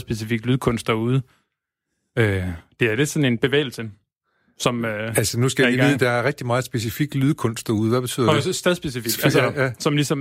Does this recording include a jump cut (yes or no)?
no